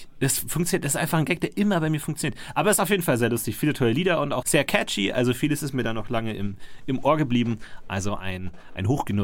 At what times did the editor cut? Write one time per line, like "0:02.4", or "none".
0:04.4